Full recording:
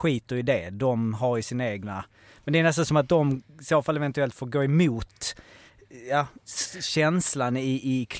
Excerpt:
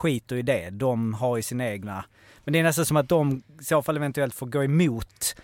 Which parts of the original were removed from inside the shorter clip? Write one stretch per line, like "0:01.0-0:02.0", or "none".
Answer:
none